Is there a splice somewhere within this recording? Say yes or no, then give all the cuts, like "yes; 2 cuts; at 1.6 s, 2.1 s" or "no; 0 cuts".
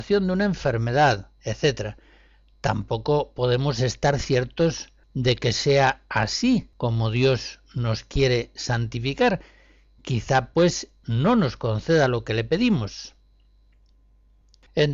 no; 0 cuts